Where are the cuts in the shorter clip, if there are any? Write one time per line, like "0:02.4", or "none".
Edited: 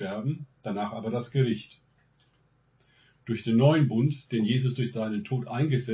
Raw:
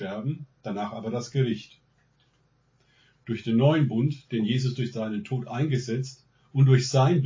none